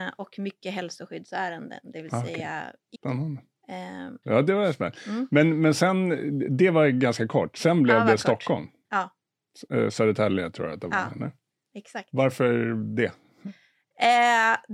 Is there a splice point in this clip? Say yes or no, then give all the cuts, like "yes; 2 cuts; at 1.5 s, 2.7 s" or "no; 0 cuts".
yes; 2 cuts; at 2.9 s, 4.2 s